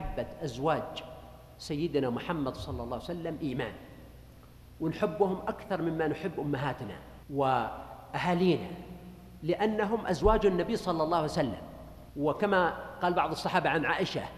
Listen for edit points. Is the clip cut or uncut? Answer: cut